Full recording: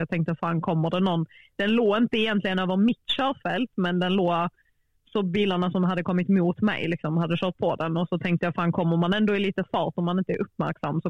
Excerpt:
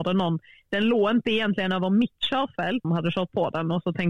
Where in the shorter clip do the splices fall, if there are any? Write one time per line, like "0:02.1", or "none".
0:02.8